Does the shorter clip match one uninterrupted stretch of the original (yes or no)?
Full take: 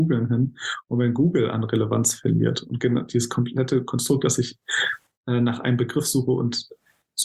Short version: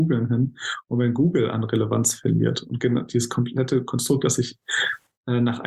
yes